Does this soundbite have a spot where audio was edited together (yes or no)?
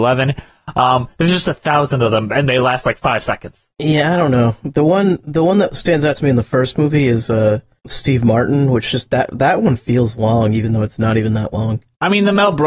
no